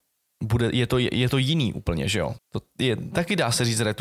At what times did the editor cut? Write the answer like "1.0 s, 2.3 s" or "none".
2.4 s